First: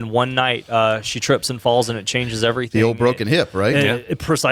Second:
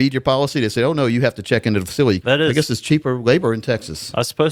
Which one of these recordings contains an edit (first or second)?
second